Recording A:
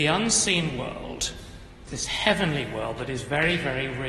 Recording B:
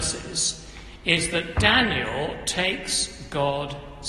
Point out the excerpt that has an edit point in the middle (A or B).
A